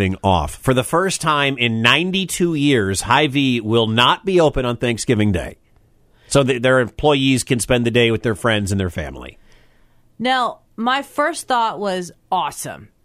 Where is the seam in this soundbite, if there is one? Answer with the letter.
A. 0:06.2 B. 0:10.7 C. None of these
B